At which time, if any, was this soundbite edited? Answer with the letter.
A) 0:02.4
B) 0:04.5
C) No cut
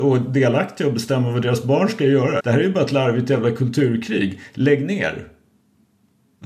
A